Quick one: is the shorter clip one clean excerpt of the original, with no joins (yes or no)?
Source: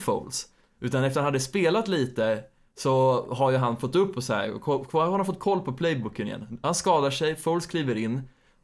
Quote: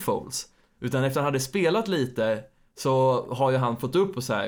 yes